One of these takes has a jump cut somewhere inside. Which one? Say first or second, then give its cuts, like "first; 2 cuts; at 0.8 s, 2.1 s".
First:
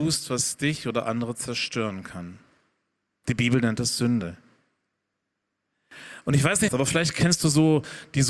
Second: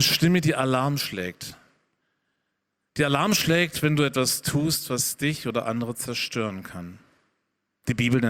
first; 1 cut; at 6.7 s